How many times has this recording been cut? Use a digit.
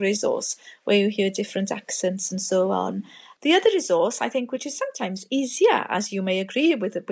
0